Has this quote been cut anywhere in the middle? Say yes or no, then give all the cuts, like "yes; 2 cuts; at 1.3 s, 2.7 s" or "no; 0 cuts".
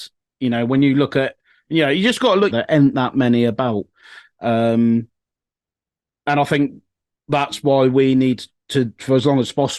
yes; 1 cut; at 2.5 s